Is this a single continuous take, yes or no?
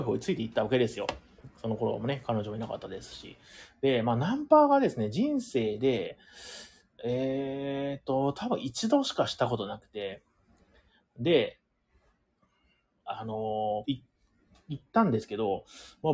no